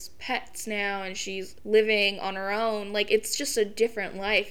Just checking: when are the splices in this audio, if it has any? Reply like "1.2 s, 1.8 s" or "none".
none